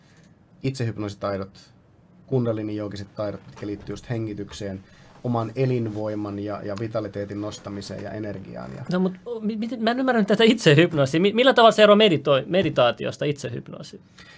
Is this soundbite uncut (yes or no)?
yes